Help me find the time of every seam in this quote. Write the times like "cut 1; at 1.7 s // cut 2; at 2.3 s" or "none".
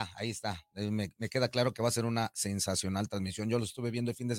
none